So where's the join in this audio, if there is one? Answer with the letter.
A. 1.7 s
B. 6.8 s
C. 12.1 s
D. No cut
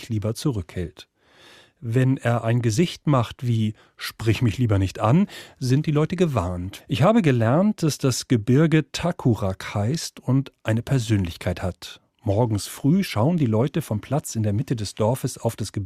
B